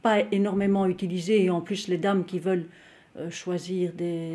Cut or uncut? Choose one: uncut